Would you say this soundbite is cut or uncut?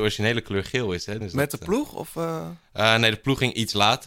cut